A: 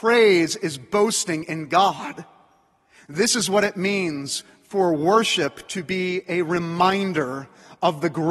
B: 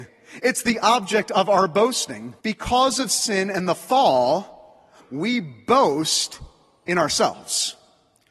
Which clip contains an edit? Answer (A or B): B